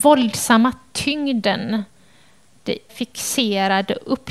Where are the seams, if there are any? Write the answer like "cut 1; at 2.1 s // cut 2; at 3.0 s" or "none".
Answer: cut 1; at 2.9 s